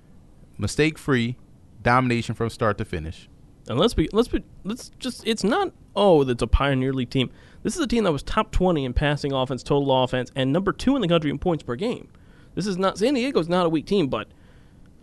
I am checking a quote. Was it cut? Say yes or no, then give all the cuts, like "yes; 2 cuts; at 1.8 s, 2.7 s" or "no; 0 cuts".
no; 0 cuts